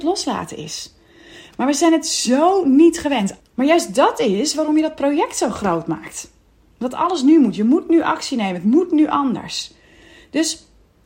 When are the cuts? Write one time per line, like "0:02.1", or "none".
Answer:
0:03.4